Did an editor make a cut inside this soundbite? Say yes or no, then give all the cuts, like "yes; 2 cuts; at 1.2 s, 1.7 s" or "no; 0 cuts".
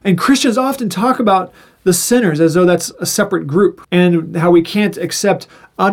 yes; 1 cut; at 3.8 s